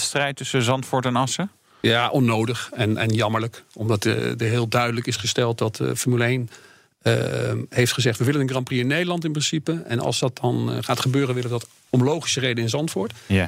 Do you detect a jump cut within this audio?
no; 0 cuts

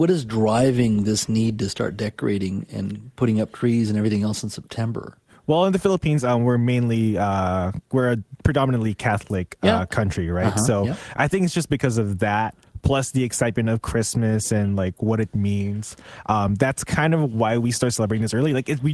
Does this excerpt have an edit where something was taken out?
no; 0 cuts

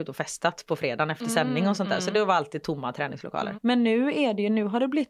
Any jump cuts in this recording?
no; 0 cuts

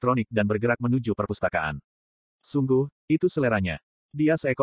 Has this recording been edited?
yes; 1 cut; at 2.3 s

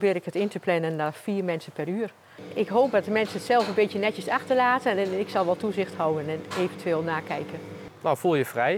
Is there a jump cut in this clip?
no; 0 cuts

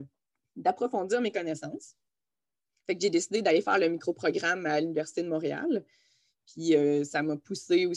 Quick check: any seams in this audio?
no; 0 cuts

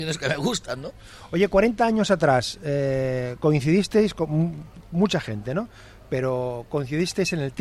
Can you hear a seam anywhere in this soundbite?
no; 0 cuts

